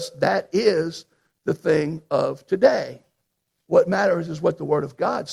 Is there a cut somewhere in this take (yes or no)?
yes